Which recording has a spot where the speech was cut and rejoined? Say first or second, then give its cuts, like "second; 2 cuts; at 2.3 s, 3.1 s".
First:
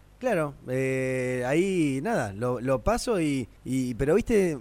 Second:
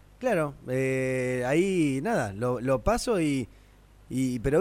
first; 1 cut; at 3.6 s